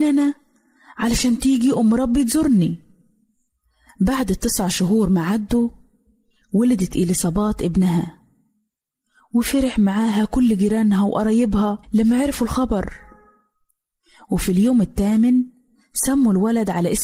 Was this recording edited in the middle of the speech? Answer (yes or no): yes